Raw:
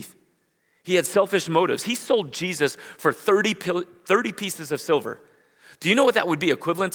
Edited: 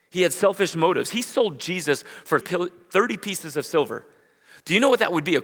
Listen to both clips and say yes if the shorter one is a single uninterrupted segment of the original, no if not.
no